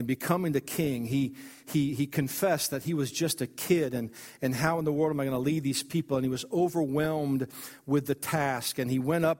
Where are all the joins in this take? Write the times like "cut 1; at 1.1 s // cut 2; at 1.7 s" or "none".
none